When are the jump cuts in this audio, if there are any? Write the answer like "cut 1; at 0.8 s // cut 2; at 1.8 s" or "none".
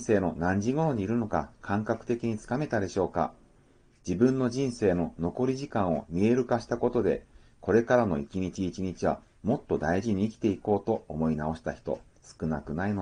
none